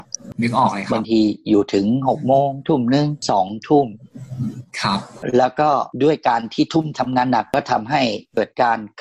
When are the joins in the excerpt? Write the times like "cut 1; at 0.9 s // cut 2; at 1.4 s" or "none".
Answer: cut 1; at 6.9 s